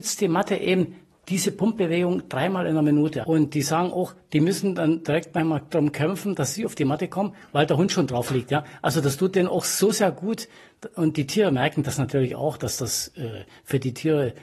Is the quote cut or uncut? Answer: cut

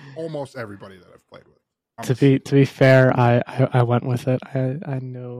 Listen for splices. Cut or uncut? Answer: cut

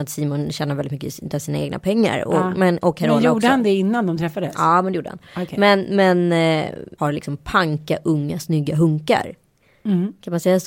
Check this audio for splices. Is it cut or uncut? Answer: cut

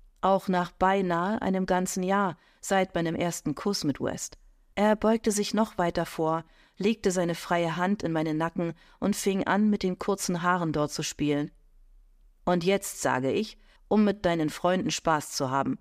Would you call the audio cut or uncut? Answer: cut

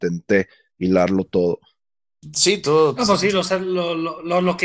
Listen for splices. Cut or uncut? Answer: uncut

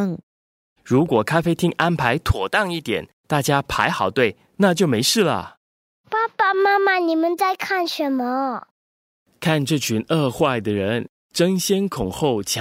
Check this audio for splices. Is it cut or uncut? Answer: uncut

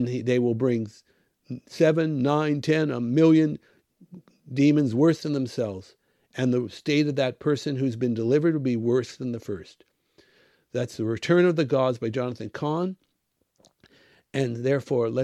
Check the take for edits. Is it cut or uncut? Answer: uncut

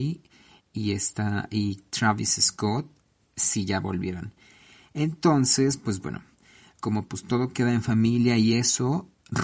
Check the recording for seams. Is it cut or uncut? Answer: uncut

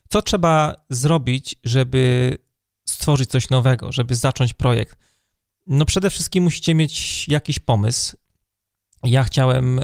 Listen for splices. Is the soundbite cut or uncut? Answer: uncut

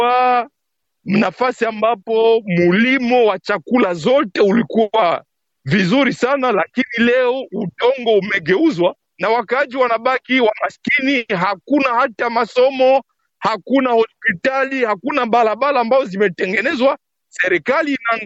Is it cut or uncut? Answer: uncut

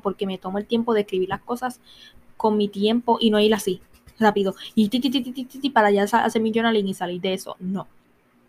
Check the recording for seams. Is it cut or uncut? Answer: cut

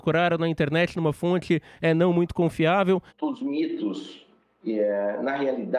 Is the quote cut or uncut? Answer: cut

